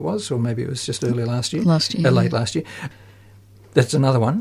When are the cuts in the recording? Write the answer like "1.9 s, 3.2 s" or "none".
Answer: none